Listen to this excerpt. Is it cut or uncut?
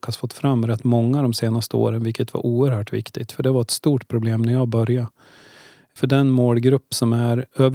cut